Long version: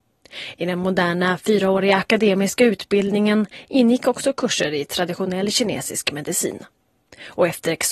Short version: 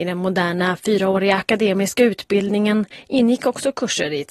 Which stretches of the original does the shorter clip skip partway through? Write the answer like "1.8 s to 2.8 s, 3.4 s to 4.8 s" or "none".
none